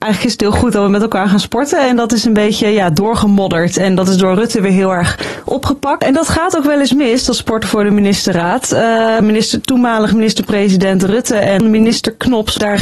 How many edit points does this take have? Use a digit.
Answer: 1